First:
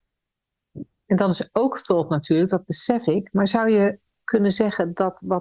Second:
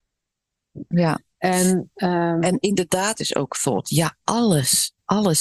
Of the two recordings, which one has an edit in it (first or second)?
second